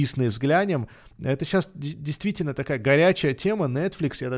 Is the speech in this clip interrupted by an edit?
no; 0 cuts

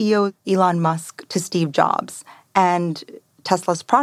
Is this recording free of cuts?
yes; 0 cuts

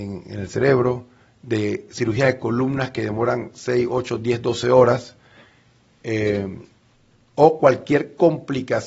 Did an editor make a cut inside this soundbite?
no; 0 cuts

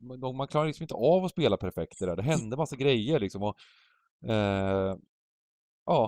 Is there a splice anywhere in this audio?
no; 0 cuts

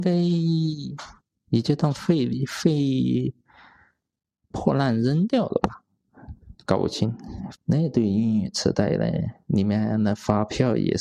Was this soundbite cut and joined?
yes; 1 cut; at 7.5 s

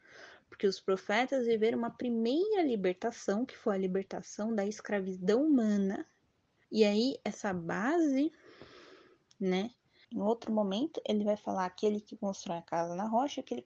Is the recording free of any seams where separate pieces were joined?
no; 2 cuts; at 6.6 s, 10.0 s

